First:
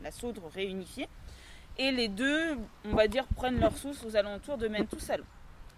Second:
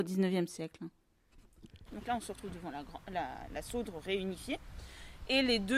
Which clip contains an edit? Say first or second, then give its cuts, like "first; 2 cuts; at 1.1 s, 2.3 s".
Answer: second; 1 cut; at 1.9 s